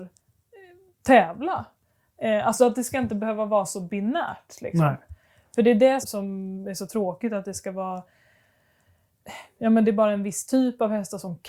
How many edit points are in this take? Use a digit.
1